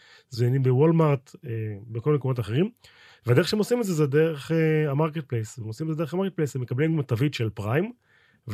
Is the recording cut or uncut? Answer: uncut